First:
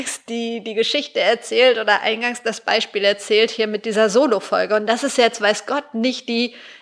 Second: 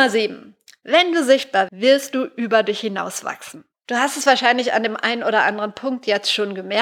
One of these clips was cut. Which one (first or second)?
second